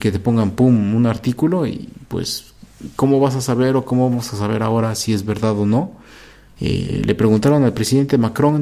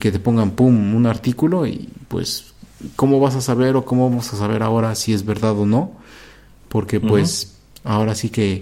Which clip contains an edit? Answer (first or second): first